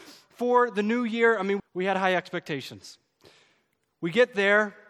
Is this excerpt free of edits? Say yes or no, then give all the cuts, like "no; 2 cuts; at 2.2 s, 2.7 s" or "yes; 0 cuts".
no; 1 cut; at 1.6 s